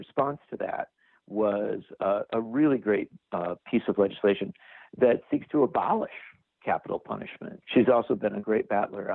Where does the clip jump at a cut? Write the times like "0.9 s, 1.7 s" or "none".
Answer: 7.6 s